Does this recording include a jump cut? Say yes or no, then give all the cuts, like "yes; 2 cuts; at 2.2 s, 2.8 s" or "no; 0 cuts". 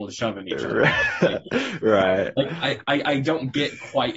no; 0 cuts